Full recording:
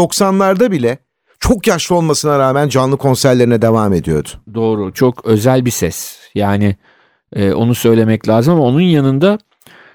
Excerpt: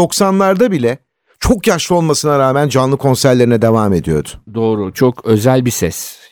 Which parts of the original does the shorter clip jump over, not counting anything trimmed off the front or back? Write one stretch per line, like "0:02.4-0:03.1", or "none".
none